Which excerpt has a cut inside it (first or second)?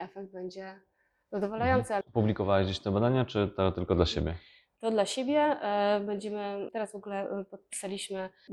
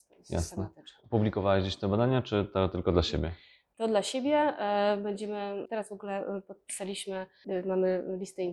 first